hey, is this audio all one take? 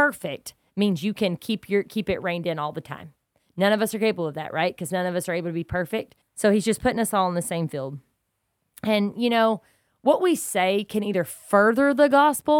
no; 1 cut; at 6.2 s

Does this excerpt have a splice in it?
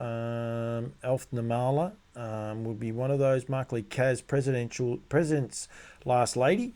no; 0 cuts

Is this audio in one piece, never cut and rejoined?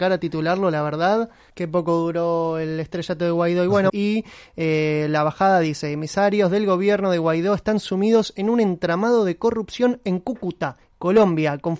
no; 2 cuts; at 1.5 s, 3.9 s

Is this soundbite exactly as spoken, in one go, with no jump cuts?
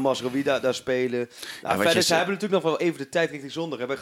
yes; 0 cuts

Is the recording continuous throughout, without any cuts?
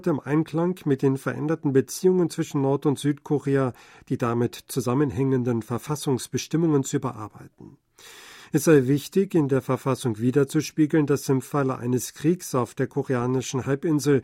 yes; 0 cuts

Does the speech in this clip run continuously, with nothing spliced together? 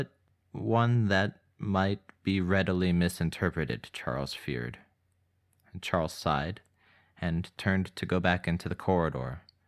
yes; 0 cuts

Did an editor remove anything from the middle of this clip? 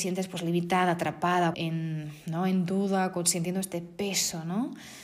yes; 1 cut; at 1.5 s

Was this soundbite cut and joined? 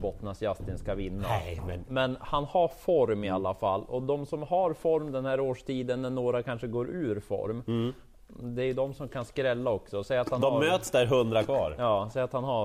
no; 0 cuts

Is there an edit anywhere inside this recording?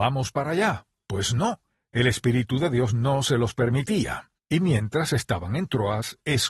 yes; 1 cut; at 4.3 s

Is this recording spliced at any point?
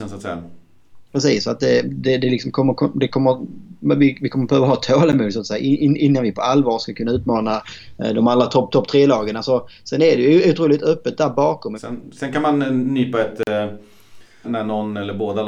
yes; 3 cuts; at 1.1 s, 11.8 s, 14.4 s

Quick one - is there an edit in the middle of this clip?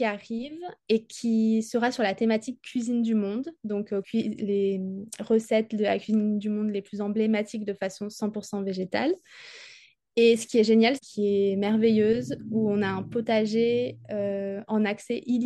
yes; 2 cuts; at 4.0 s, 11.0 s

